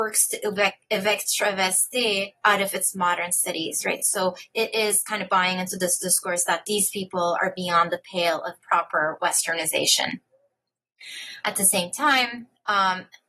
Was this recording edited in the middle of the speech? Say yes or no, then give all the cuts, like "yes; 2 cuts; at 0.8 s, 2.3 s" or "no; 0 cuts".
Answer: no; 0 cuts